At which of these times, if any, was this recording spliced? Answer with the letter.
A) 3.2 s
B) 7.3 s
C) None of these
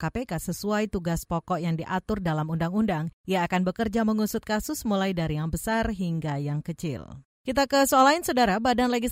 B